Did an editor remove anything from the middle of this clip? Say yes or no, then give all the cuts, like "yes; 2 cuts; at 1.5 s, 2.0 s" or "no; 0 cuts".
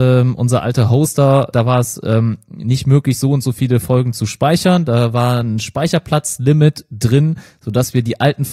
yes; 1 cut; at 1.5 s